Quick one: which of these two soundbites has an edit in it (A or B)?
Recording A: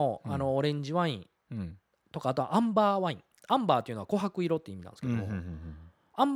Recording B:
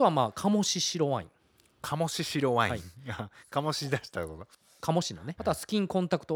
B